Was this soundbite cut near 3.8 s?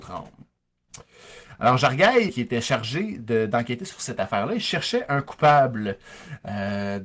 no; 1 cut; at 2.3 s

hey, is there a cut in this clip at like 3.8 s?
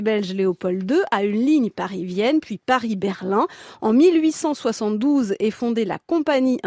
no; 0 cuts

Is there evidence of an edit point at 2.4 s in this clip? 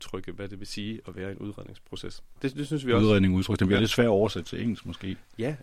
yes; 1 cut; at 2.4 s

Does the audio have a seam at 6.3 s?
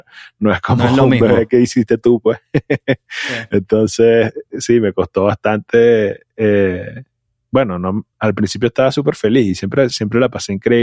no; 2 cuts; at 8.1 s, 9.9 s

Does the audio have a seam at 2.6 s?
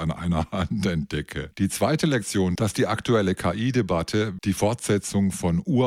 yes; 3 cuts; at 1.5 s, 2.6 s, 4.4 s

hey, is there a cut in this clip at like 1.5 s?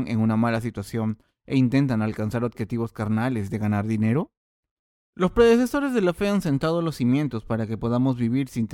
no; 1 cut; at 4.9 s

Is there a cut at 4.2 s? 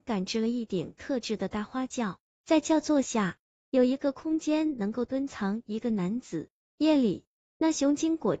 no; 1 cut; at 6.7 s

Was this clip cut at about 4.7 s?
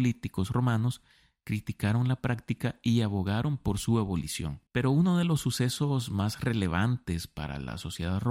yes; 1 cut; at 4.7 s

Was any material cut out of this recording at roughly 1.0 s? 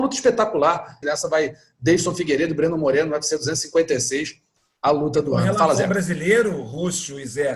yes; 1 cut; at 1.0 s

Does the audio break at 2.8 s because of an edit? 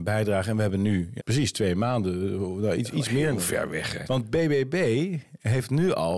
no; 2 cuts; at 1.2 s, 4.0 s

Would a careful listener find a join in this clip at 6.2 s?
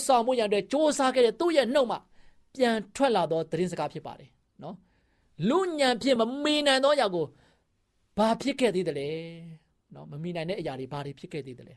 no; 0 cuts

